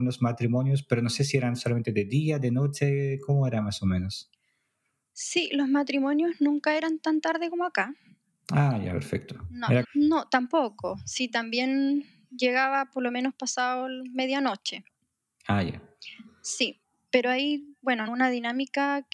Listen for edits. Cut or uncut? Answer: cut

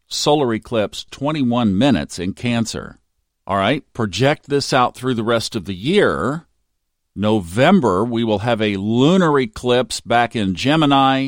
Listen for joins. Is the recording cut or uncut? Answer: cut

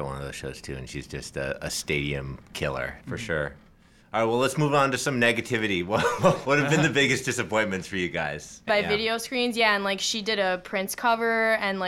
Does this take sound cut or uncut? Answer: cut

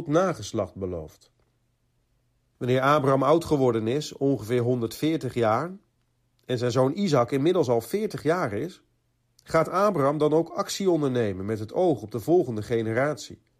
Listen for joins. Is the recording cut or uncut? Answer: cut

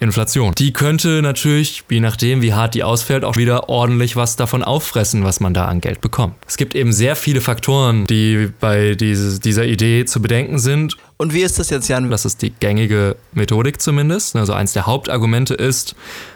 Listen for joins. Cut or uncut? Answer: cut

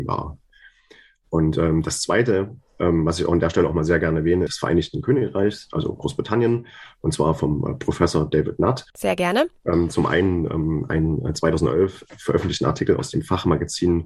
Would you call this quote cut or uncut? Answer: cut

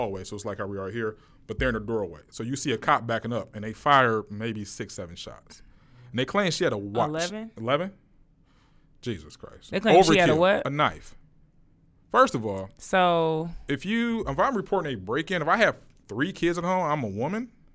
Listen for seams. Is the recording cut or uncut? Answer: uncut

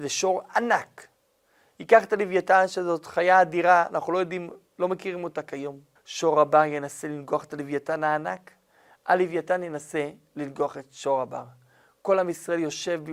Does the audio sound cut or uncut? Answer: cut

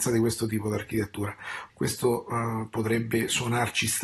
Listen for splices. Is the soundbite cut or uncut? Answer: cut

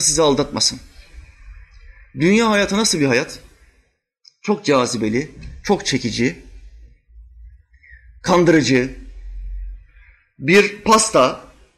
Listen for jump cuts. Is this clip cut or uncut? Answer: uncut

